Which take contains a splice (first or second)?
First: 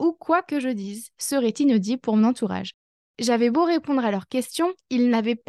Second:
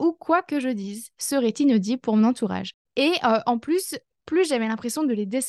second